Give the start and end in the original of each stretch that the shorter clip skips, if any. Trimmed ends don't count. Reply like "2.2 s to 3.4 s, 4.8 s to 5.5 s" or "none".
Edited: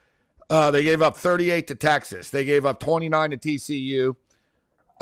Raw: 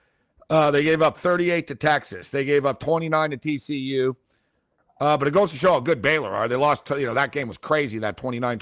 none